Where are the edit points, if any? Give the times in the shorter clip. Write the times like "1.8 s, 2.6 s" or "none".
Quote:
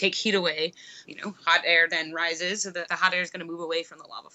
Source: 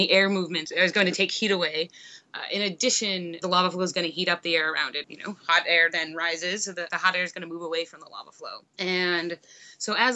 1.0 s